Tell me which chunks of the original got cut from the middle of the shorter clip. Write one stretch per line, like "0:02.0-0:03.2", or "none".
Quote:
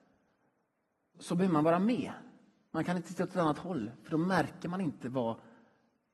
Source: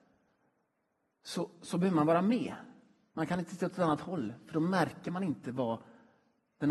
0:01.1-0:01.6